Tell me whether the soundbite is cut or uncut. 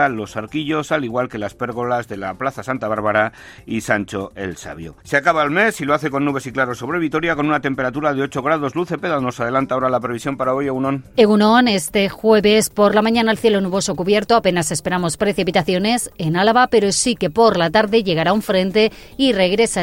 cut